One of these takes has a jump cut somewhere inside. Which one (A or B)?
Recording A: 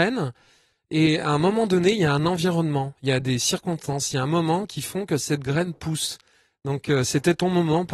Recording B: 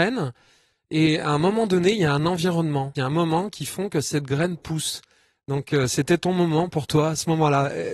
B